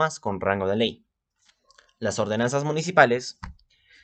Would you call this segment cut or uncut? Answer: uncut